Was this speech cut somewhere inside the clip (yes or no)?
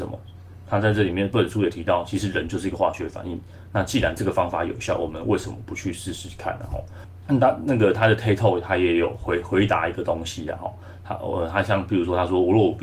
no